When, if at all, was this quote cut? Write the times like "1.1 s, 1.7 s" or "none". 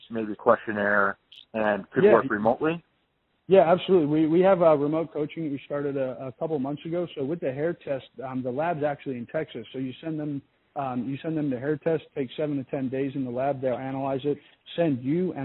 none